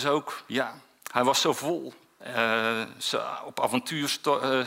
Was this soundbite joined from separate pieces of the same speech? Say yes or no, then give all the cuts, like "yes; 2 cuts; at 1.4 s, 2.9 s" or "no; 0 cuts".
yes; 1 cut; at 2.2 s